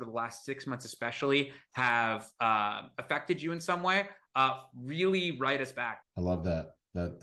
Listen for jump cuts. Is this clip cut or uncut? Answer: cut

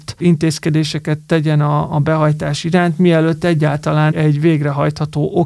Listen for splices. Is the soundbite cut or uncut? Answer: cut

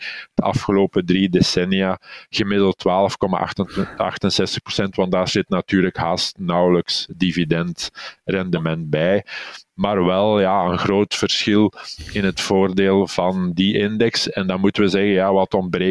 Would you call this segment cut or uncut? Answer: uncut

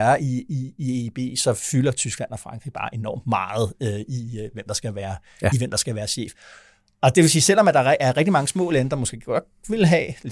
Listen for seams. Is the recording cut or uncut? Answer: uncut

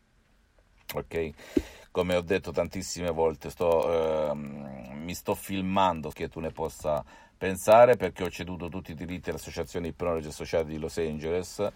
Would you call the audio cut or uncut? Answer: cut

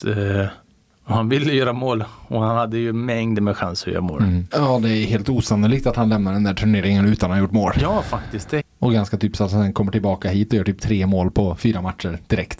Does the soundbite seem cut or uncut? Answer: cut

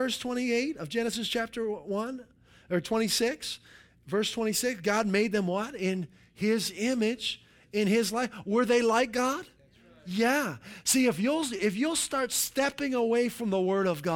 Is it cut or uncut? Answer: uncut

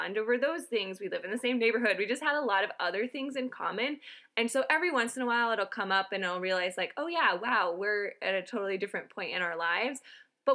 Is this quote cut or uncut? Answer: uncut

